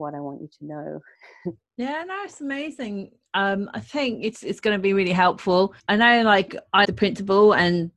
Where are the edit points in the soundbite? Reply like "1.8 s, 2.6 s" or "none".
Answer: 5.8 s, 6.8 s